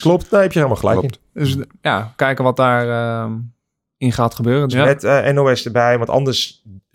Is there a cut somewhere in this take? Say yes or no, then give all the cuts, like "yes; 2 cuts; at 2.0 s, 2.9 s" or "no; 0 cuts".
yes; 1 cut; at 4.7 s